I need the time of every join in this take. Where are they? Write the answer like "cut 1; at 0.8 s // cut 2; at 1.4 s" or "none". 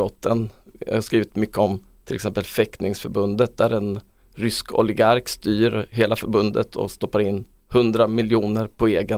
none